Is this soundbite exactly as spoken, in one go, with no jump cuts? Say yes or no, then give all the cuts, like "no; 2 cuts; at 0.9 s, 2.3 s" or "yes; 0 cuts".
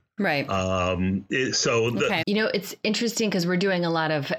no; 1 cut; at 2.2 s